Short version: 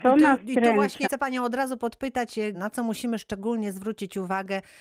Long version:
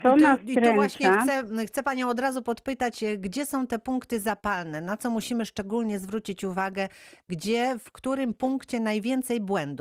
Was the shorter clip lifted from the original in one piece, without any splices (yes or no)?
no